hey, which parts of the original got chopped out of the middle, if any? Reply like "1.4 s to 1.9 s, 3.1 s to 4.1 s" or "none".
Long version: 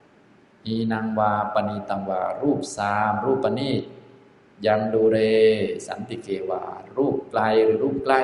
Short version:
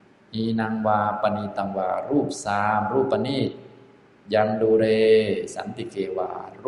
none